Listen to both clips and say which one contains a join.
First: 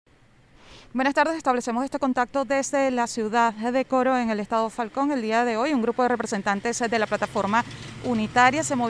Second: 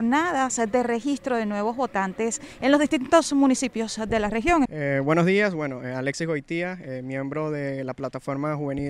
second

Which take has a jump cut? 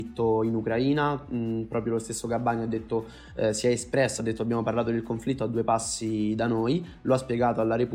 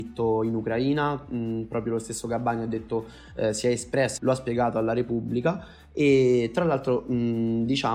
second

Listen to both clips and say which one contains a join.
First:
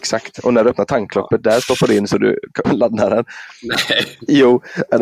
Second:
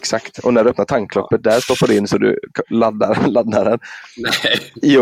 first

